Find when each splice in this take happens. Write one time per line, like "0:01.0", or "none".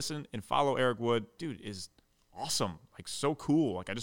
0:01.4